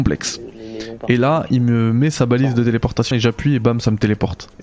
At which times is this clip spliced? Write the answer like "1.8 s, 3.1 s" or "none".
3.1 s